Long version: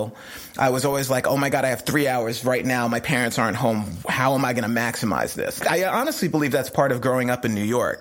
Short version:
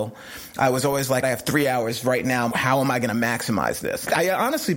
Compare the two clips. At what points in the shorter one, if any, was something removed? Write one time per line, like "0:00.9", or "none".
0:01.2
0:02.5